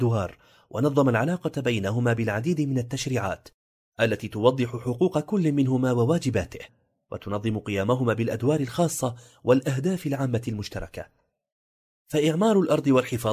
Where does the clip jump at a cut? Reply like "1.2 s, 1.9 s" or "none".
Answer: none